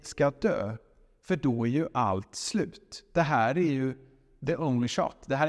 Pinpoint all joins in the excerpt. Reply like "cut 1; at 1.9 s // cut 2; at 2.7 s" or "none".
none